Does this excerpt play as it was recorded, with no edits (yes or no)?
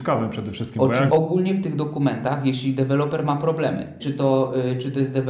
no